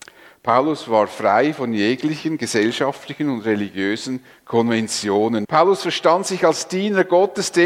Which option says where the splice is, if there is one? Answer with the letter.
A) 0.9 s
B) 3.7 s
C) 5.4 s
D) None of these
C